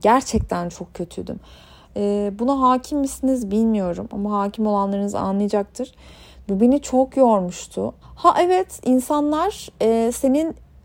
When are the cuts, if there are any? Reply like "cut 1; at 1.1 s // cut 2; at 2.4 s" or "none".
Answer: cut 1; at 1.8 s // cut 2; at 6.4 s // cut 3; at 8.0 s